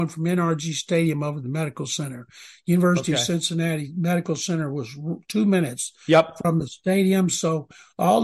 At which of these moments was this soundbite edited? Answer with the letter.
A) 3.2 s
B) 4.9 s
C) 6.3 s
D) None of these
D